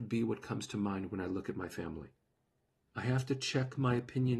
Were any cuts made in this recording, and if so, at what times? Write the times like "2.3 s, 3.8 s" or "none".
2.8 s